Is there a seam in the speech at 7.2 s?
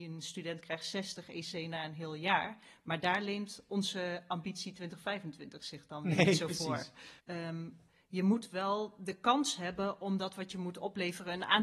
yes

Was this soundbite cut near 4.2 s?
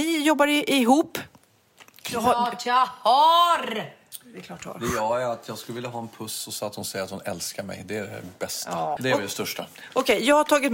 no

